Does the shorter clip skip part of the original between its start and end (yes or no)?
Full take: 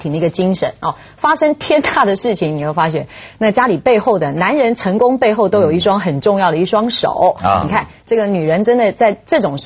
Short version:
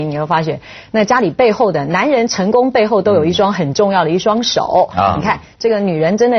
no